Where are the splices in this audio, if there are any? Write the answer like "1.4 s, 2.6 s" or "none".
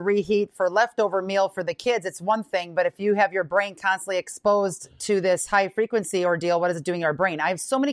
none